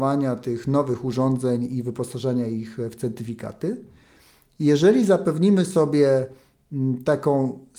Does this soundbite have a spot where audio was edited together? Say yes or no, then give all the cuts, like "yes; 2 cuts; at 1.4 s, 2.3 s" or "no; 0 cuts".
no; 0 cuts